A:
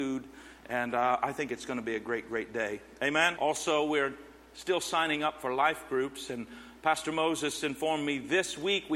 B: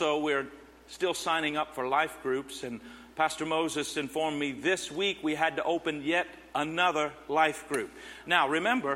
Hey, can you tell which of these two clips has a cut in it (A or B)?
A